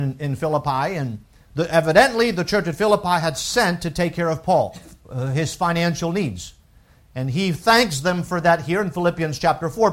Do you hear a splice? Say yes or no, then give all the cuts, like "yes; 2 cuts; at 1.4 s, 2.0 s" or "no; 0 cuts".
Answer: no; 0 cuts